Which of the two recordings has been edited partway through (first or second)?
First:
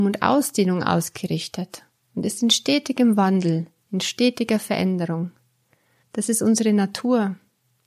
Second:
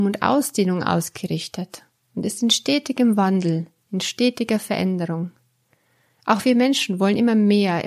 first